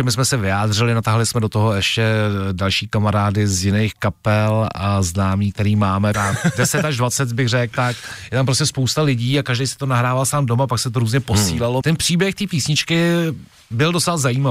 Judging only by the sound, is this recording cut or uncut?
cut